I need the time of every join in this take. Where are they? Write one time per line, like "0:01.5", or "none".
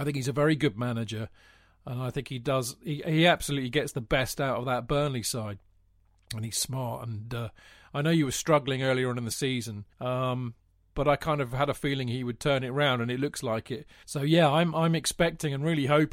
0:09.9
0:14.0